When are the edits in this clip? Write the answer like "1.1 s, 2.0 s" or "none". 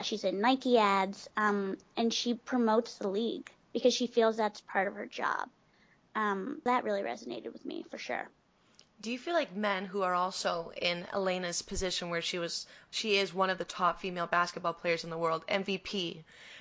6.7 s